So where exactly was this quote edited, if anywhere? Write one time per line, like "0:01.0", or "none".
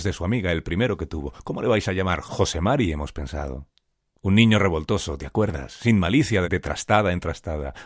0:06.4